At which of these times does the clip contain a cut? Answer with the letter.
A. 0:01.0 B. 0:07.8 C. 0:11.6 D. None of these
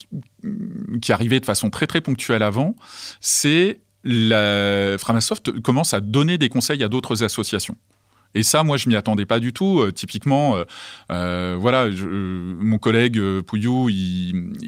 D